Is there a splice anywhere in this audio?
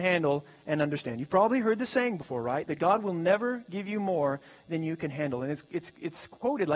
no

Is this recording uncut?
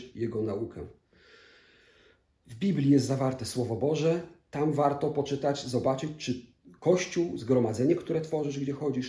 yes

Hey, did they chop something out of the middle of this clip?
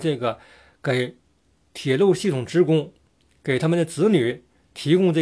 no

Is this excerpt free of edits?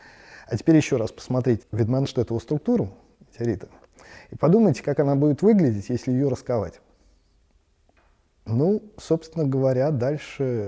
no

